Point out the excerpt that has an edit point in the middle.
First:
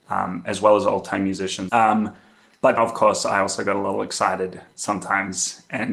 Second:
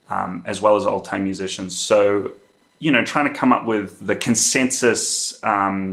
first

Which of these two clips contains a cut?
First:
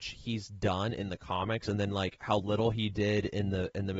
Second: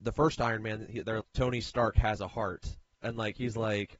second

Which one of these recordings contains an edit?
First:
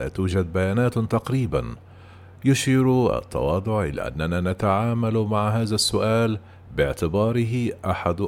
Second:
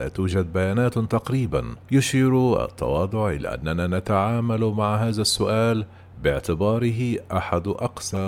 second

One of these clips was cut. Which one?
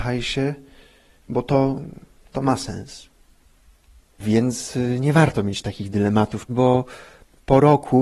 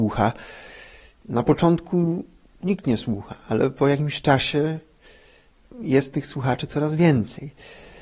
first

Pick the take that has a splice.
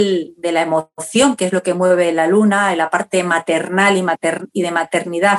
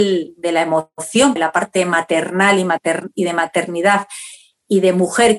second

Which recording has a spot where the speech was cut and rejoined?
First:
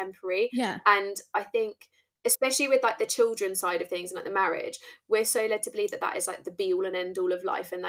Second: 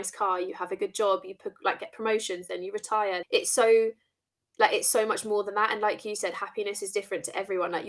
second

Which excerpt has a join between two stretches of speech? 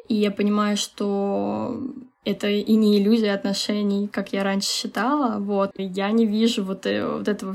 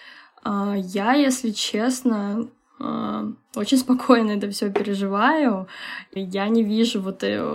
first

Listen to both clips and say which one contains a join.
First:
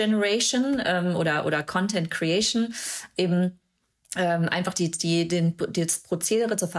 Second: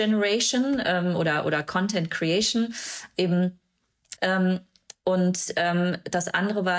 second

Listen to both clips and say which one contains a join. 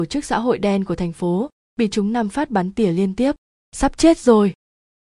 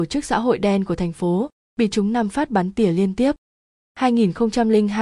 first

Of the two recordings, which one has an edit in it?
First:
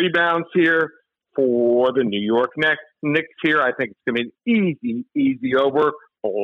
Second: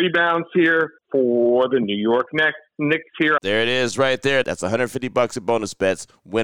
second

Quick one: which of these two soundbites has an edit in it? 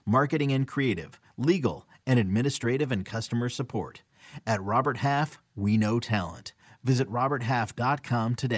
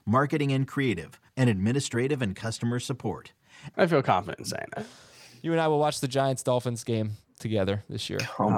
second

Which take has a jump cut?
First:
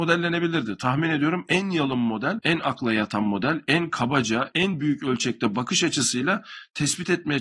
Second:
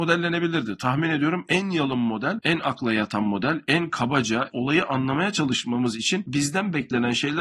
second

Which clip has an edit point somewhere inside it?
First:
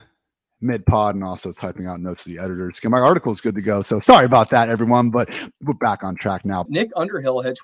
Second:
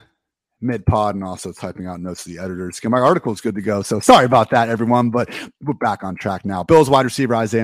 first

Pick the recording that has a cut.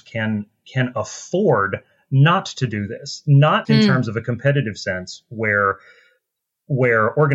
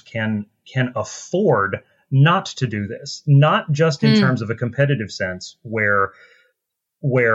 first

